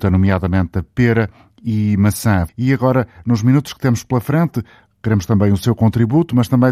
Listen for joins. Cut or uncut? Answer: cut